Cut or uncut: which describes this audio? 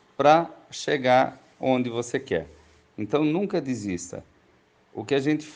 uncut